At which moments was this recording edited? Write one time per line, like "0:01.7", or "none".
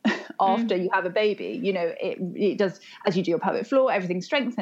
none